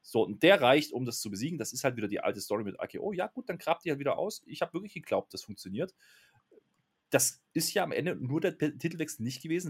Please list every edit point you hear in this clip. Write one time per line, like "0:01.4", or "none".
none

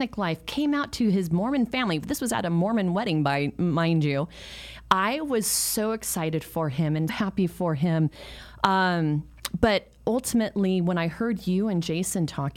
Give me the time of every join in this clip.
0:07.1

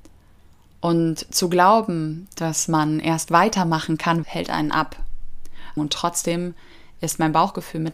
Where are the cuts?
0:04.2
0:05.8

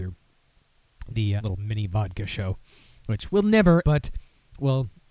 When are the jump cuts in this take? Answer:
0:01.4
0:03.8

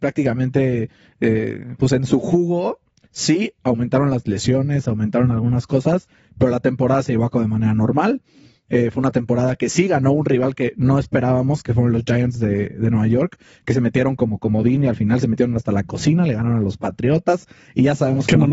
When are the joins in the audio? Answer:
none

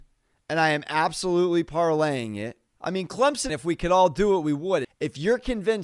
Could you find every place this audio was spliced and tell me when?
0:03.5
0:04.8

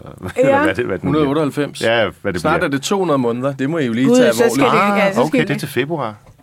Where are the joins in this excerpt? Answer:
0:05.4

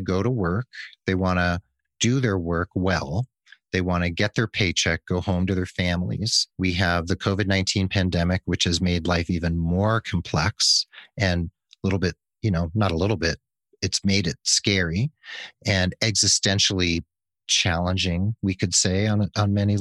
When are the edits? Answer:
0:06.5

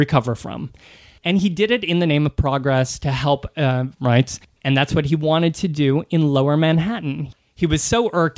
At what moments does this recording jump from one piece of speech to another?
0:03.9

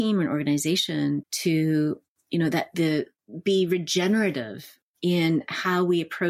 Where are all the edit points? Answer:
0:01.2

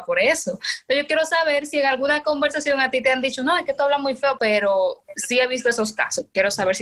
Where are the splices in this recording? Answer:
0:04.4

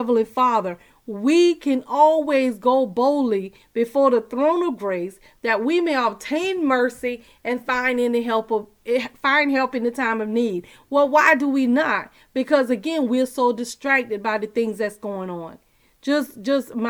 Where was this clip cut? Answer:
none

